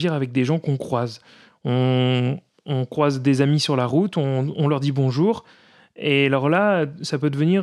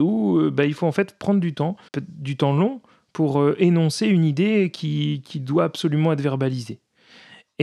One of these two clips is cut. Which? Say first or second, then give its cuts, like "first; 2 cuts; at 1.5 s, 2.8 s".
second; 1 cut; at 1.9 s